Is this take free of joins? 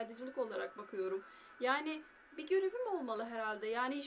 yes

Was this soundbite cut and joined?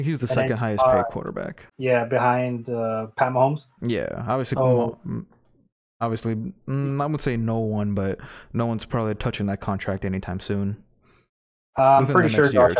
yes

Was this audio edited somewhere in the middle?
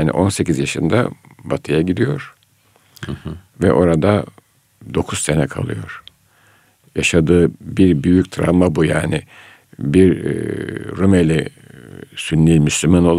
no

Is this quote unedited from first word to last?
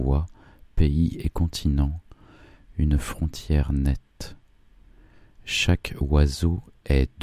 yes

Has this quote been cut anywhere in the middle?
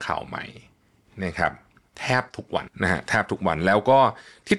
yes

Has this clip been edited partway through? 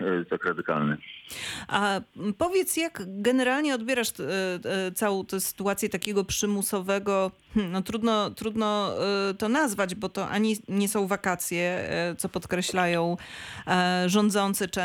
no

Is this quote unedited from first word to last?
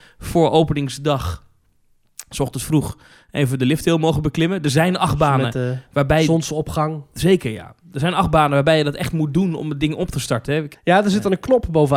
no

